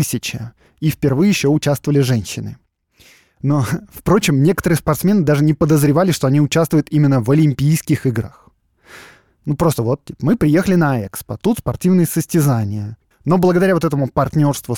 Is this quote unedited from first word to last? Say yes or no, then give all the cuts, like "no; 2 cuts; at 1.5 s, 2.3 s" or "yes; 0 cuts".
no; 1 cut; at 13.1 s